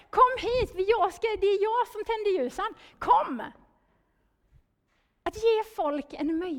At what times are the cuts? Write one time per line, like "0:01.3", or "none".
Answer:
none